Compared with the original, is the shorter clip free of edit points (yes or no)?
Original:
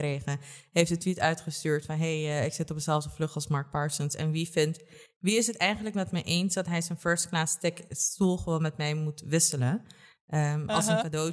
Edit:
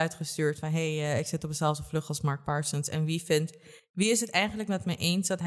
yes